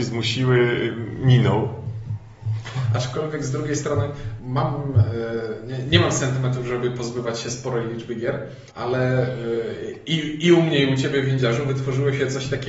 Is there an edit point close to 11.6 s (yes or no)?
no